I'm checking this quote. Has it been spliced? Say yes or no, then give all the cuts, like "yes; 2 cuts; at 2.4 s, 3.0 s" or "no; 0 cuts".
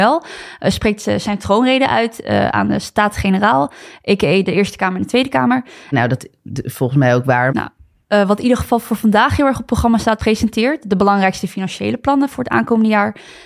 yes; 3 cuts; at 5.9 s, 7.5 s, 10.2 s